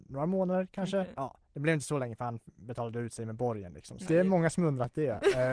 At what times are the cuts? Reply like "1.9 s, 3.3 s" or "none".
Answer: 1.2 s, 4.1 s

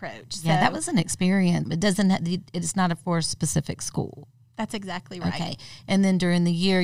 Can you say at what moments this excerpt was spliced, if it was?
1.7 s

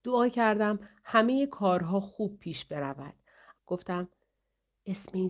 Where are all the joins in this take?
3.6 s

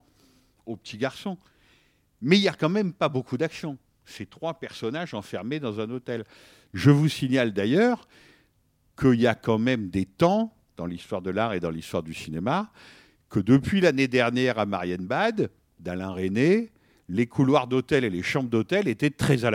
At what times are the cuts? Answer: none

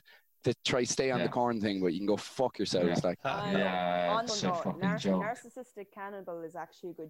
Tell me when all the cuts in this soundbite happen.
3.2 s, 4.3 s

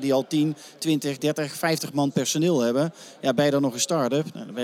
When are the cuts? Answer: none

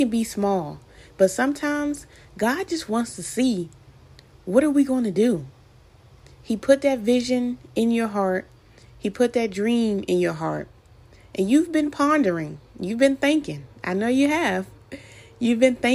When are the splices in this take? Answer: none

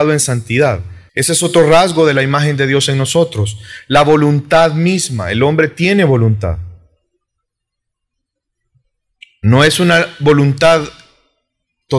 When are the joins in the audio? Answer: 1.1 s

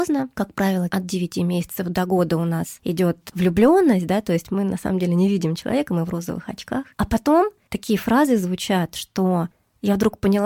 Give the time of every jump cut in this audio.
none

